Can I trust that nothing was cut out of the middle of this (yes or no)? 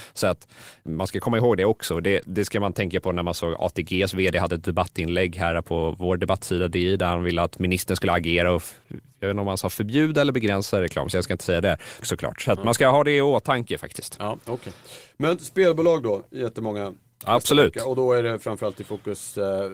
no